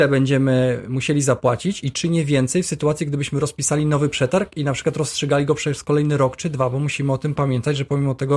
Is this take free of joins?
yes; 0 cuts

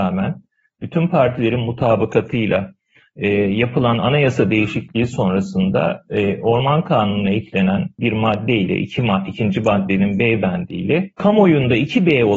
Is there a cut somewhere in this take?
no; 0 cuts

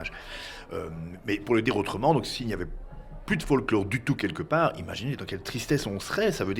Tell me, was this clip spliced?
no; 0 cuts

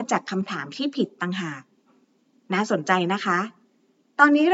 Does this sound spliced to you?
no; 0 cuts

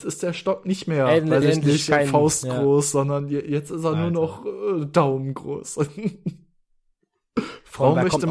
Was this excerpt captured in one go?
yes; 0 cuts

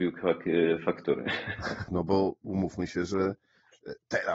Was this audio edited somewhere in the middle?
yes; 1 cut; at 1.9 s

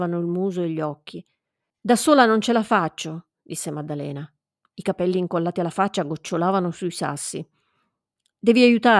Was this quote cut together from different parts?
yes; 1 cut; at 1.7 s

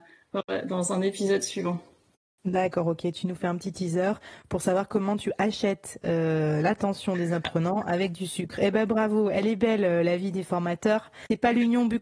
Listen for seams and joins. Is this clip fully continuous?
yes; 0 cuts

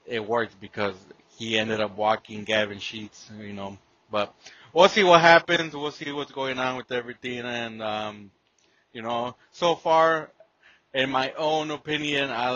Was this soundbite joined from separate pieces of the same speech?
no; 0 cuts

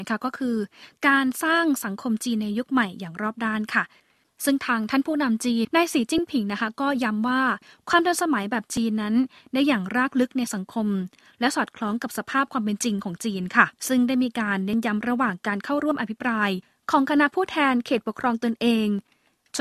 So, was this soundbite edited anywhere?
yes; 2 cuts; at 5.6 s, 13.8 s

